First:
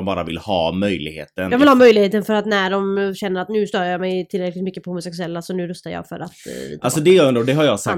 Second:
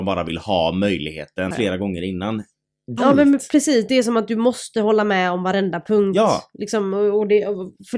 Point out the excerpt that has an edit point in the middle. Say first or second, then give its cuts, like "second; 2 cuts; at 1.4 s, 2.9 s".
second; 2 cuts; at 1.5 s, 3.0 s